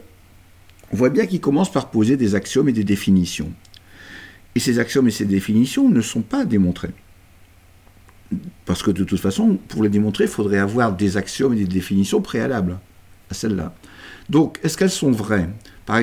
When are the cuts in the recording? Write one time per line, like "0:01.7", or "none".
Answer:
none